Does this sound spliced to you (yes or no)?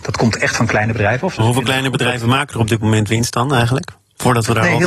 no